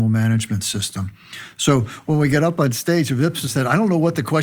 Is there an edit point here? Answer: no; 0 cuts

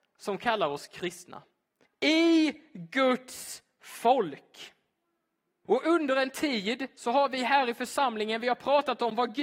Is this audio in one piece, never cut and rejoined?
no; 2 cuts; at 1.8 s, 5.6 s

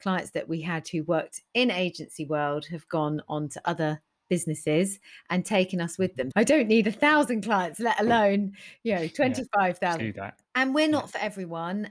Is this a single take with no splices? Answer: no; 2 cuts; at 6.3 s, 10.0 s

